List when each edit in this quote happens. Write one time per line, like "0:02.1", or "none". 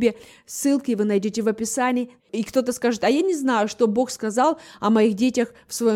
0:02.2